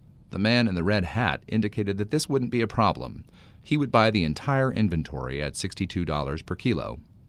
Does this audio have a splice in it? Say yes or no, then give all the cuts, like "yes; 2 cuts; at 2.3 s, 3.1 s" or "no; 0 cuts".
no; 0 cuts